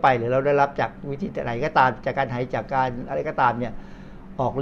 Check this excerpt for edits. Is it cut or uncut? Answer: cut